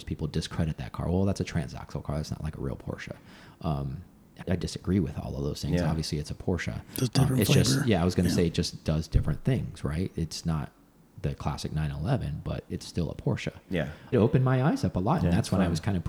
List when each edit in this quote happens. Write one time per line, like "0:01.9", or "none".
0:04.4
0:14.1